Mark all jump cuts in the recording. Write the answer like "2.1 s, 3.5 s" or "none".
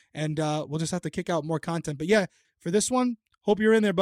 2.4 s